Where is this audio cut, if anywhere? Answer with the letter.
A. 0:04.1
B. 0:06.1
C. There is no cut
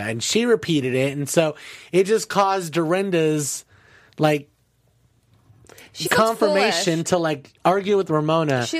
B